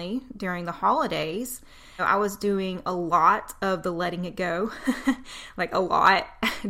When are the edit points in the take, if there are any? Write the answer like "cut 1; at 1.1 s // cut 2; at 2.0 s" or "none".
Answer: cut 1; at 2.0 s